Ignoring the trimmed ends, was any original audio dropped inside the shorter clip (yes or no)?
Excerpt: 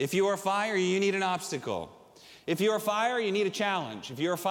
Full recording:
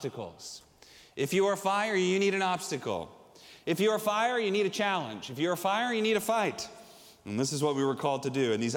no